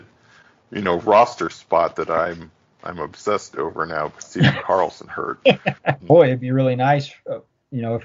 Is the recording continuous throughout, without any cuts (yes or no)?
no